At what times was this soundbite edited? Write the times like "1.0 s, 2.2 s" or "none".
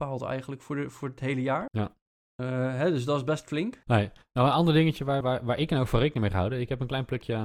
1.7 s, 3.8 s, 5.2 s